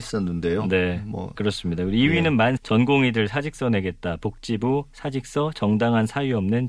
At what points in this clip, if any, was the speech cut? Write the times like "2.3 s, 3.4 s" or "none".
2.6 s